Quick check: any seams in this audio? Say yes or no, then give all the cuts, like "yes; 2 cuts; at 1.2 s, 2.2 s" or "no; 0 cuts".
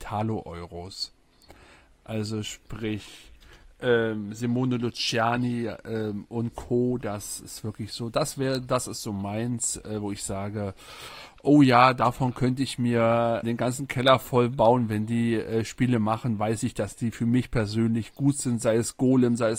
yes; 1 cut; at 13.4 s